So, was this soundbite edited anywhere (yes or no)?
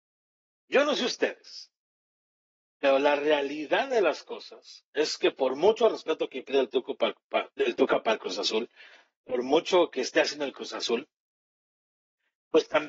no